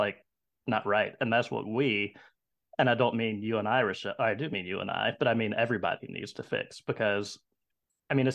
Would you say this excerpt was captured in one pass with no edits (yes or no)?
yes